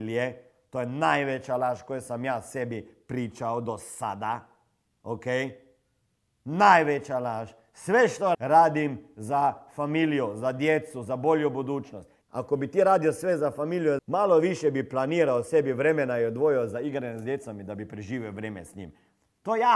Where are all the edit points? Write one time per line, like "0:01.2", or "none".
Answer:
0:08.3
0:12.2
0:14.0